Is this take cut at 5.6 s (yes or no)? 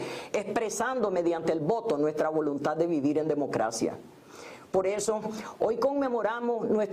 no